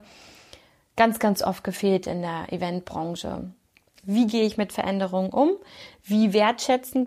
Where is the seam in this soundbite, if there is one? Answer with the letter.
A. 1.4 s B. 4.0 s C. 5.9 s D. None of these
B